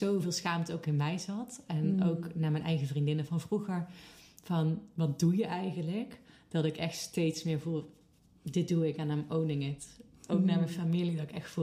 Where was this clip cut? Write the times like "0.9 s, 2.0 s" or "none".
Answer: none